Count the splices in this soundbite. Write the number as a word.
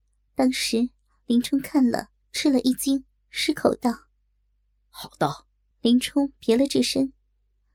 one